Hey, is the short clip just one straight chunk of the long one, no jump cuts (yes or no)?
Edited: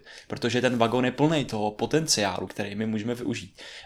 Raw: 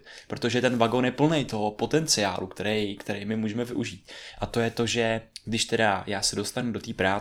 no